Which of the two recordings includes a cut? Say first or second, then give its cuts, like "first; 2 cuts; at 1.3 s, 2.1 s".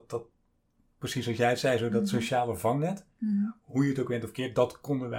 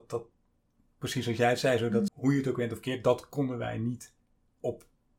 second; 1 cut; at 2.1 s